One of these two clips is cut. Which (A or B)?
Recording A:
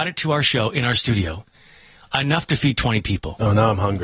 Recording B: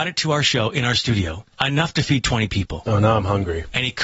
B